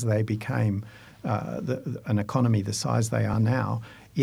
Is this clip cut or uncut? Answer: uncut